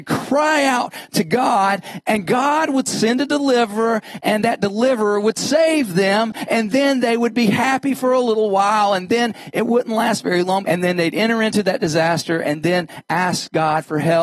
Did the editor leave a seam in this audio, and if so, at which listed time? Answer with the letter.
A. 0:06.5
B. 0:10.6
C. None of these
B